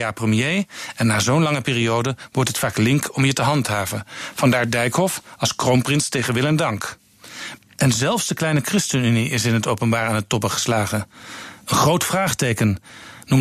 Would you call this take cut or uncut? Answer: cut